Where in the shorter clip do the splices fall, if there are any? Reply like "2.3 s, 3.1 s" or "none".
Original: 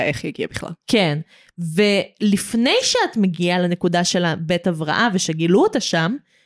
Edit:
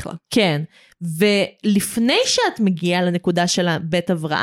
none

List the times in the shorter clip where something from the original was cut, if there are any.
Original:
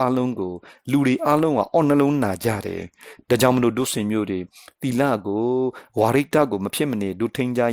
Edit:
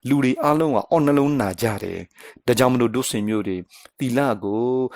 none

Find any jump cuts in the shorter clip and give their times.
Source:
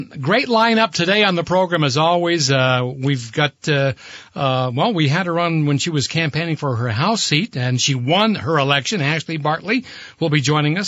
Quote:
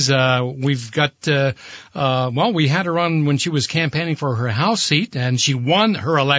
none

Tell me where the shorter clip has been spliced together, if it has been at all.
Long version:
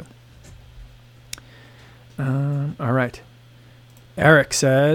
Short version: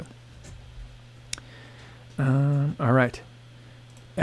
none

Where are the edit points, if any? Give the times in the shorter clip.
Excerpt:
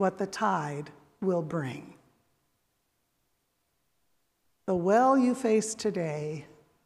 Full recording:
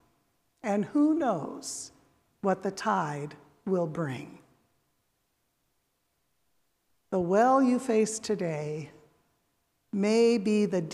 none

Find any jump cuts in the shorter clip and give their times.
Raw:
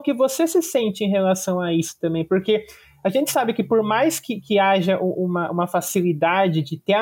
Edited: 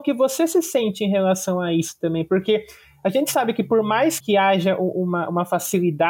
4.2 s

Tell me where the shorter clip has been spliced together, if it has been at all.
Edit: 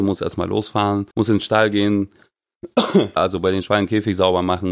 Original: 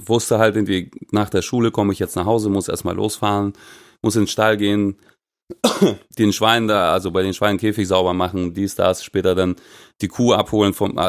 1.1 s, 3.2 s

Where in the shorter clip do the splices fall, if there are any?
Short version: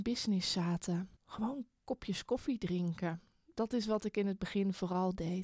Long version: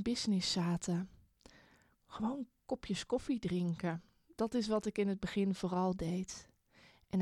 1.2 s

